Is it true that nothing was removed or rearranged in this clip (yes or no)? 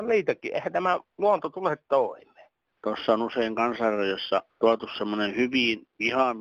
no